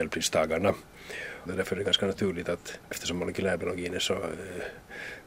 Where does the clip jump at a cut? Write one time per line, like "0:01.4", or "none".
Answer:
0:01.5
0:02.9